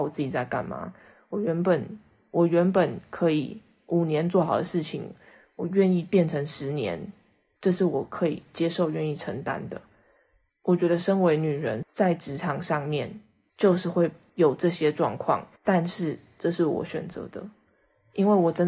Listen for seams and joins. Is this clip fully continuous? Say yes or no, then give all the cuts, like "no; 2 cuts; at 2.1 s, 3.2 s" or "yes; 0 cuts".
no; 2 cuts; at 11.8 s, 15.6 s